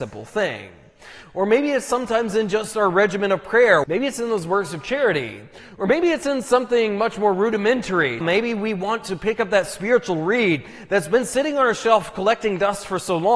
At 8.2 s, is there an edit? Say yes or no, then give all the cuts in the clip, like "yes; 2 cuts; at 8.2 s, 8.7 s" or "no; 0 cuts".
yes; 2 cuts; at 3.8 s, 8.2 s